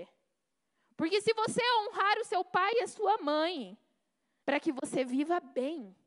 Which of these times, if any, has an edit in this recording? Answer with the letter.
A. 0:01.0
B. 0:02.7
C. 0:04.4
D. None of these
C